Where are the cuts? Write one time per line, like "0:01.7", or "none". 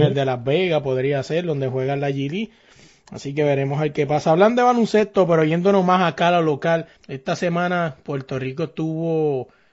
0:07.0